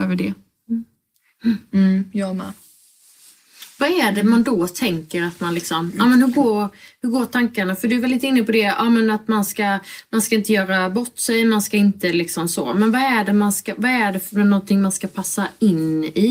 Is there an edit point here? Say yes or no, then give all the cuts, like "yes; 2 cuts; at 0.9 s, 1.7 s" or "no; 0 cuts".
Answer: no; 0 cuts